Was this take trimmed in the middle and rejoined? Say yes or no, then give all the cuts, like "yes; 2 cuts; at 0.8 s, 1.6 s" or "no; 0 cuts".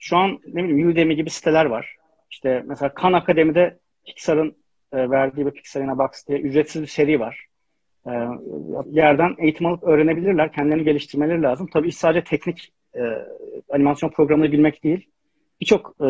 yes; 1 cut; at 8.8 s